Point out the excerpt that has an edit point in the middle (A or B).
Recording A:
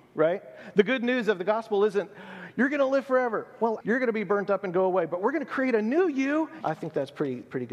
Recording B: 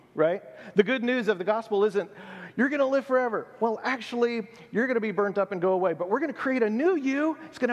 A